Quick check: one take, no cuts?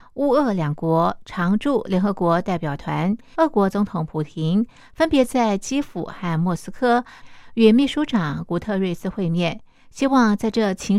no; 1 cut; at 3.3 s

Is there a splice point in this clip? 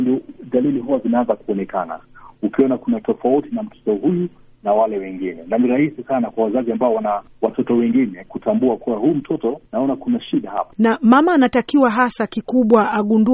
no; 0 cuts

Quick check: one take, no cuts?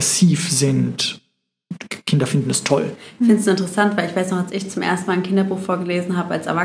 yes; 0 cuts

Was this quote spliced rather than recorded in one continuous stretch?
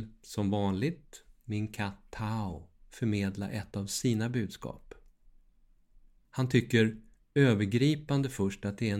no; 0 cuts

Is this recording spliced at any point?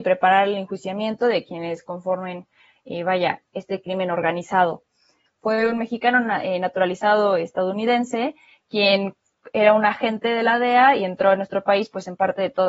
yes; 1 cut; at 5.3 s

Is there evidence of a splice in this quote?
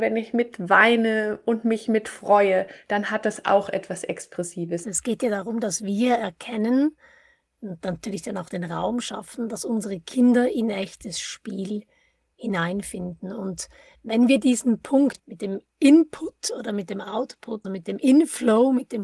yes; 2 cuts; at 4.8 s, 17.6 s

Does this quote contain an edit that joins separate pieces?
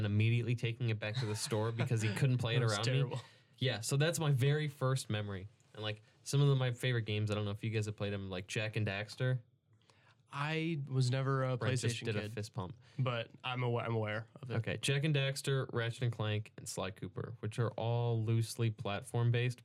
no; 0 cuts

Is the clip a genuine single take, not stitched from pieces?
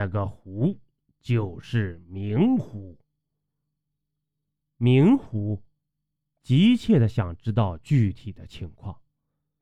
no; 1 cut; at 6.3 s

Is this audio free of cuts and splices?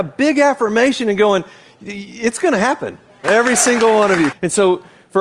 no; 2 cuts; at 3.2 s, 4.3 s

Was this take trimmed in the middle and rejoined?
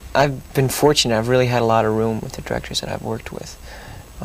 no; 0 cuts

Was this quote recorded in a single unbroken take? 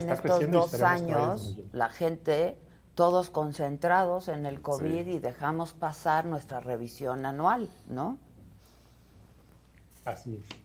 yes; 0 cuts

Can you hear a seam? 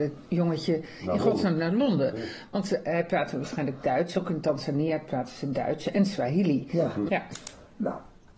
yes; 1 cut; at 7.1 s

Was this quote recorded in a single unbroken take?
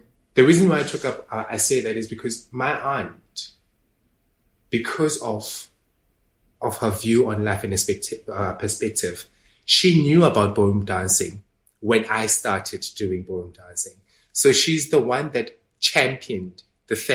yes; 0 cuts

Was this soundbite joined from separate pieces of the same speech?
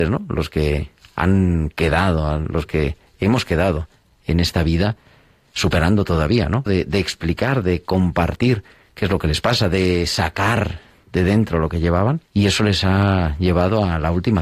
yes; 2 cuts; at 6.7 s, 12.3 s

